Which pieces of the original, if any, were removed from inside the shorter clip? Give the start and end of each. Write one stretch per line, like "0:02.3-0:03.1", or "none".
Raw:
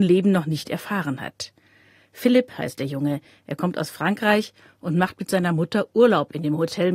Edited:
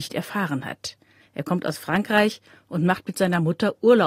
0:01.8-0:03.3